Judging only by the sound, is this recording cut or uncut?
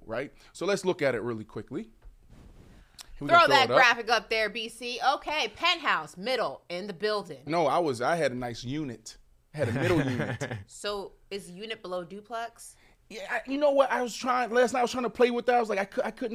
cut